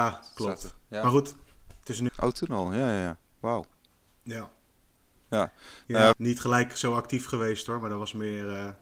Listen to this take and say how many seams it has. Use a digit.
2